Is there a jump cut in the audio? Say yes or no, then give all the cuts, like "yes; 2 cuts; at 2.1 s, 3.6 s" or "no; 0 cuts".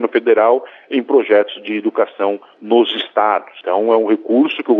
no; 0 cuts